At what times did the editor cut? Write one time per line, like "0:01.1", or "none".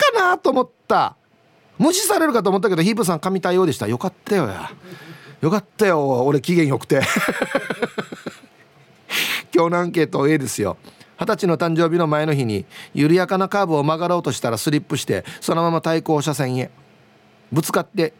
none